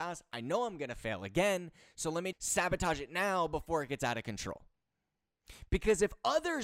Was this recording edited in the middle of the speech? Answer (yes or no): yes